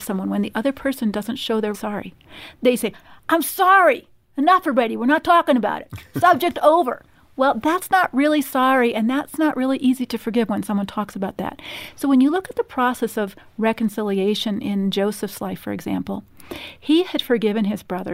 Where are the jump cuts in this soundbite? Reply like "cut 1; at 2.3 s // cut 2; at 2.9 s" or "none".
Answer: cut 1; at 1.7 s